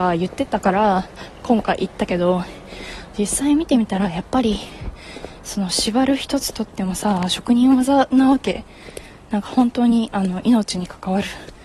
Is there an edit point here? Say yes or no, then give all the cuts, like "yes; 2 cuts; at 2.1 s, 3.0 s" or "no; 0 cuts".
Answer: no; 0 cuts